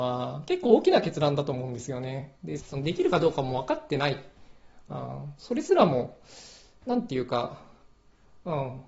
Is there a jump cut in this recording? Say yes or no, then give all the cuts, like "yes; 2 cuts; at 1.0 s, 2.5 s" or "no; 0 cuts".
yes; 2 cuts; at 2.6 s, 5.3 s